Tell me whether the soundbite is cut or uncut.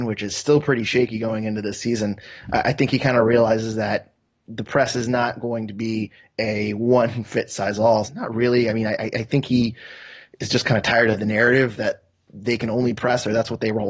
cut